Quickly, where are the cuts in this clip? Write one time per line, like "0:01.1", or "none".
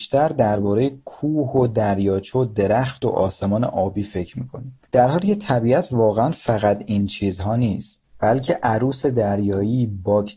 0:04.9